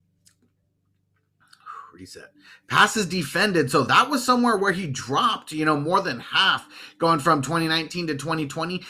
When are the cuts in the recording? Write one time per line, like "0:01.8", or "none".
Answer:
none